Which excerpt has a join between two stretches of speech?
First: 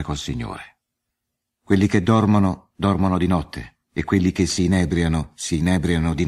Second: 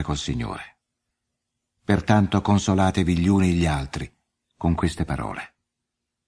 first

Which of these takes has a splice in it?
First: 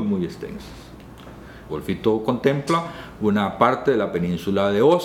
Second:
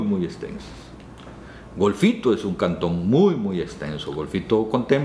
first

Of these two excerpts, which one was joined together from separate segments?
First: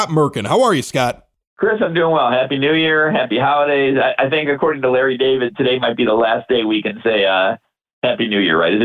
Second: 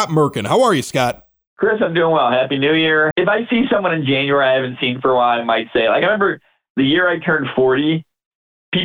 second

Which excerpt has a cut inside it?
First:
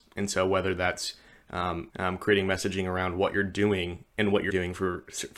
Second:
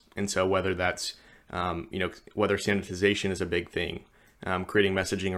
first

